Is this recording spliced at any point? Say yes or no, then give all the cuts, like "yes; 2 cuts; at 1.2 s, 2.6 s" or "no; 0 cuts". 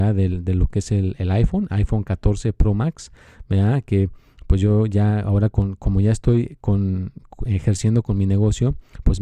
no; 0 cuts